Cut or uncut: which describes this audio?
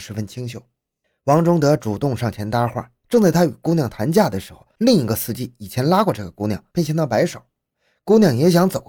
uncut